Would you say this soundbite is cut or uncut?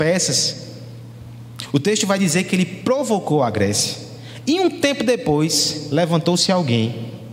uncut